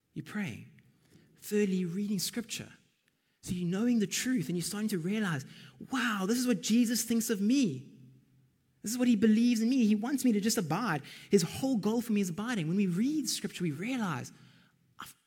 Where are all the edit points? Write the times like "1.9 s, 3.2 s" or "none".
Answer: none